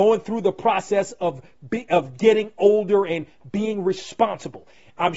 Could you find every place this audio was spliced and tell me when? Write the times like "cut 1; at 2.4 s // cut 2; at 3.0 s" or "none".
none